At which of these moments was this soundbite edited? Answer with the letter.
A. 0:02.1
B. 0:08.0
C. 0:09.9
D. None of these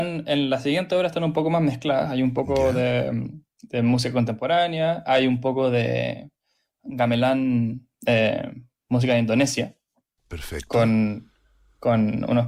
D